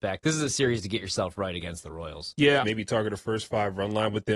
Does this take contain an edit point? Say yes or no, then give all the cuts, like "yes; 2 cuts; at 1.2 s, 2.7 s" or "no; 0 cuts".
yes; 1 cut; at 2.6 s